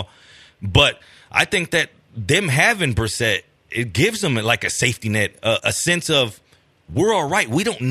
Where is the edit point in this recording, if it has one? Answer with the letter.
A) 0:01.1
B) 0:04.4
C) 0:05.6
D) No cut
C